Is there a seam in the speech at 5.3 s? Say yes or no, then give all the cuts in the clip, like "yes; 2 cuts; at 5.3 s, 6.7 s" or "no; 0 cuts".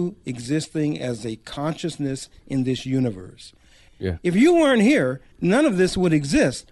yes; 2 cuts; at 3.9 s, 5.3 s